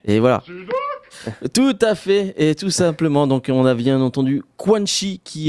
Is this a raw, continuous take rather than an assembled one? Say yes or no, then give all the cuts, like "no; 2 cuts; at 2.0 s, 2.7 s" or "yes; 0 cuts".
yes; 0 cuts